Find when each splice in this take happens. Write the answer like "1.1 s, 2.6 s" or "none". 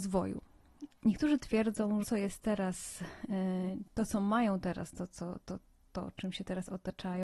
0.9 s, 2.0 s

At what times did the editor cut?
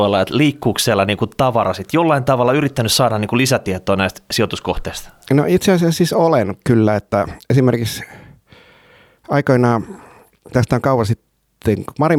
none

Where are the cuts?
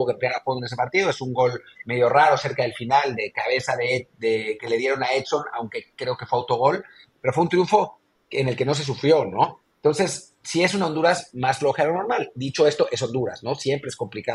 9.6 s

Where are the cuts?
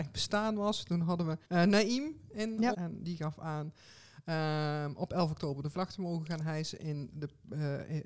1.4 s, 2.7 s

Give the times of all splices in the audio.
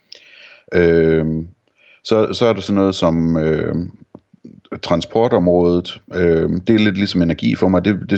none

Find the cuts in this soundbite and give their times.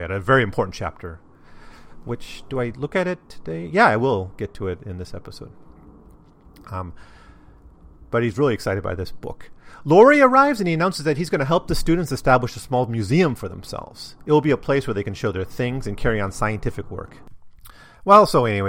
none

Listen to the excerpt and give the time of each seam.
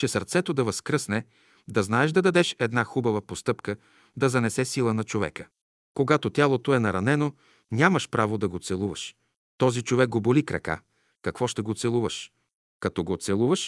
11.1 s

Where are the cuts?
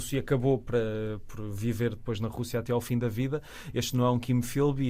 none

